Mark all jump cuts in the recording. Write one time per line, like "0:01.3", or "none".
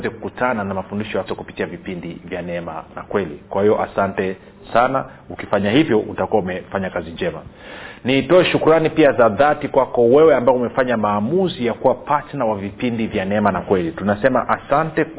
0:01.3